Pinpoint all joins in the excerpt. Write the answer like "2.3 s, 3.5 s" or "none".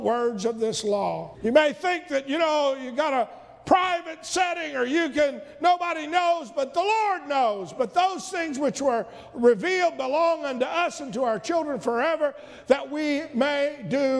1.3 s